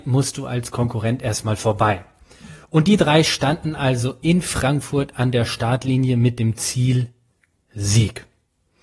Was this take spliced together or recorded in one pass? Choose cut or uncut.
uncut